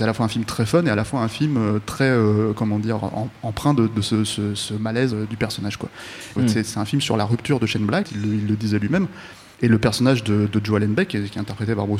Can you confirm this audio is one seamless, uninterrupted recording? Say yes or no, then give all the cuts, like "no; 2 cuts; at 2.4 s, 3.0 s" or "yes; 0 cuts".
no; 1 cut; at 6.4 s